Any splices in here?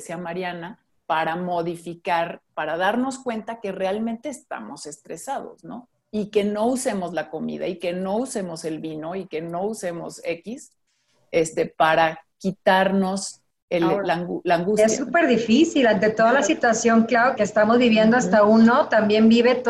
yes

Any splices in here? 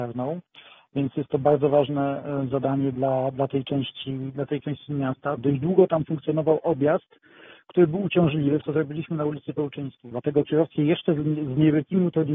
yes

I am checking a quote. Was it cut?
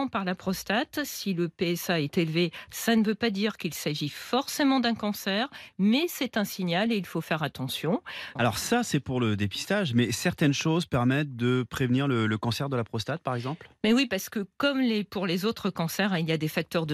yes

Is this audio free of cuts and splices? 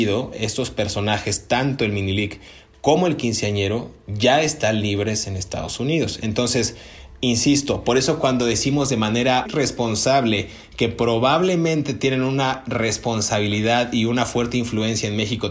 no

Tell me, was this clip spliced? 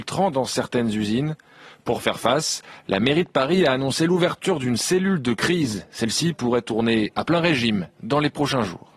no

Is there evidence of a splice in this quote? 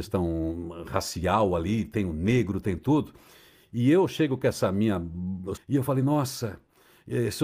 yes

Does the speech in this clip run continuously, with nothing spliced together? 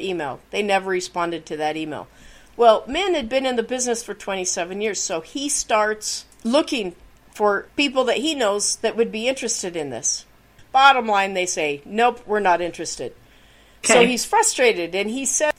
no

